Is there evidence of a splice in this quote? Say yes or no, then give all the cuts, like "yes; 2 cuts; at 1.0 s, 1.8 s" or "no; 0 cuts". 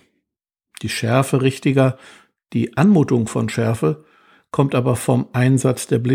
no; 0 cuts